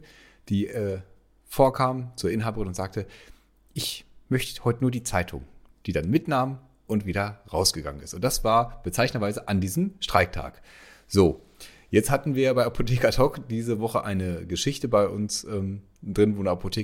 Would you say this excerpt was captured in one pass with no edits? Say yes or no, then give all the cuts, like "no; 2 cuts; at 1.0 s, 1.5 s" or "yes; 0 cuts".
yes; 0 cuts